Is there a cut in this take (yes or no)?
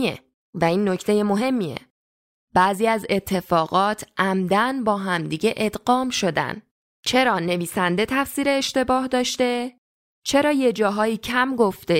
yes